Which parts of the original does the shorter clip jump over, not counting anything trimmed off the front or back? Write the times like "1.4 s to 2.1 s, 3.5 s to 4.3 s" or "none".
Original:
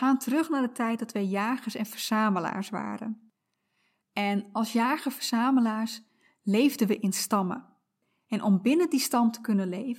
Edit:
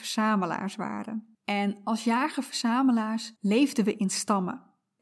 3.3 s to 4.0 s, 6.0 s to 6.4 s